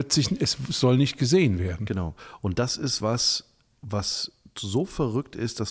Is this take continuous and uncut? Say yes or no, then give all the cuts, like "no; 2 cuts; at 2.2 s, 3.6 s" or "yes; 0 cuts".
yes; 0 cuts